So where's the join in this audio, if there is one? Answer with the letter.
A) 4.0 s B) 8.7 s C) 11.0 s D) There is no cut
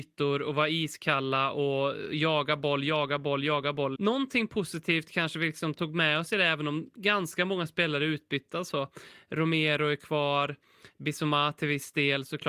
A